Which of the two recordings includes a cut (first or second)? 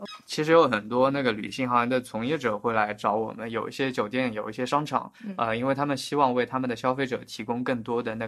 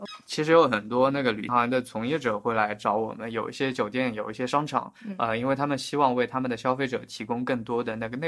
second